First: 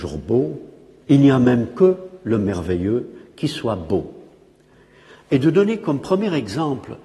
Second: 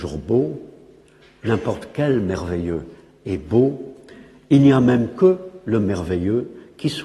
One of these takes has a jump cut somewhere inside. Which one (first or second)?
first